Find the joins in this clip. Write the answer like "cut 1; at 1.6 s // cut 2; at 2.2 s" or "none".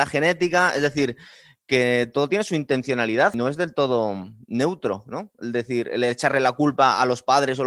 none